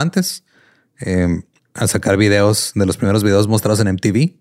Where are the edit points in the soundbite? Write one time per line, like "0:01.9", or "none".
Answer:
0:01.6